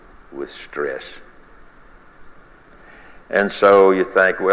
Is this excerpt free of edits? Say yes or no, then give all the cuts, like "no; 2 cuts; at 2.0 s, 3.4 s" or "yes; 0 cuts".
yes; 0 cuts